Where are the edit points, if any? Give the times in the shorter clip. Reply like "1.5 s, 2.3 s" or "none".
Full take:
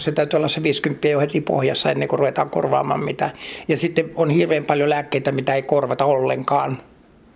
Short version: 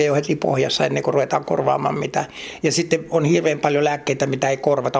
none